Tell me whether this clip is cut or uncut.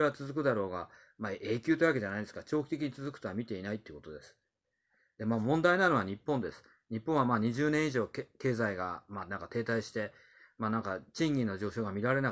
uncut